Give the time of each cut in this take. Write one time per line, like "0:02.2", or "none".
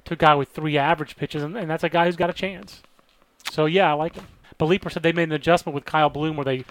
0:04.4